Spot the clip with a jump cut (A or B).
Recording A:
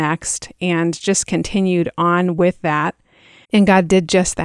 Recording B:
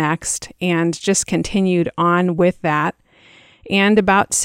A